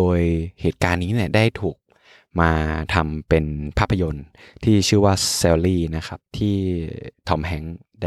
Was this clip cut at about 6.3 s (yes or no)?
yes